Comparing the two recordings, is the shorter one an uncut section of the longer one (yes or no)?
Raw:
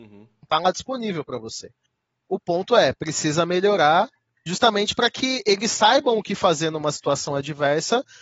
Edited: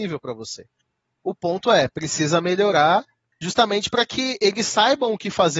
yes